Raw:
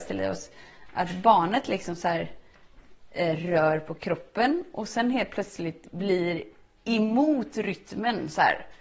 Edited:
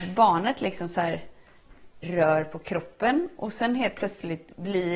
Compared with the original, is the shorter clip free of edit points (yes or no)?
no